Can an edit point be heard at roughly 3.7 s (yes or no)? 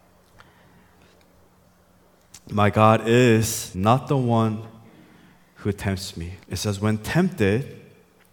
yes